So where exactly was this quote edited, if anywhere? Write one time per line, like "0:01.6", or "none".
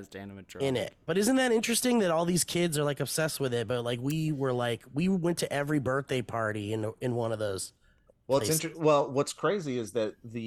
none